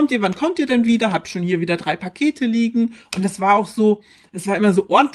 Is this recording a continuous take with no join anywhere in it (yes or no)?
yes